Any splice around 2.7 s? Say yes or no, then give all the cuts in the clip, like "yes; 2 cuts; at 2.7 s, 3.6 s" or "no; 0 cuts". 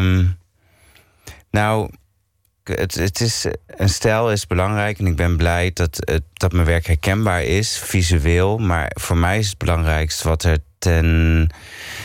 yes; 1 cut; at 2.7 s